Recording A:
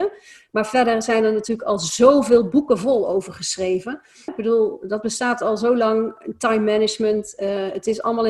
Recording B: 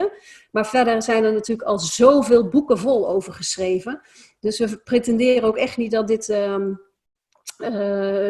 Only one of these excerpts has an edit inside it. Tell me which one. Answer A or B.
A